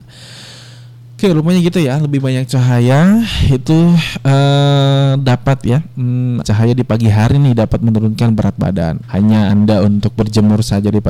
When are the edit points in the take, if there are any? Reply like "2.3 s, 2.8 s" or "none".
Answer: 6.4 s, 9.0 s